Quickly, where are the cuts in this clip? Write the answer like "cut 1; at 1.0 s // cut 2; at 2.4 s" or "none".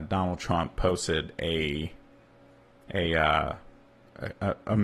none